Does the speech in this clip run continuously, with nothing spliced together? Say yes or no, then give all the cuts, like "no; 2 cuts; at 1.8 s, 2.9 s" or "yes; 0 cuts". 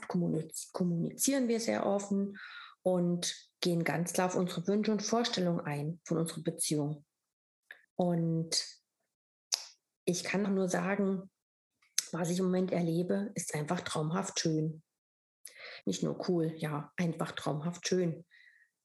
no; 3 cuts; at 7.8 s, 10.4 s, 15.8 s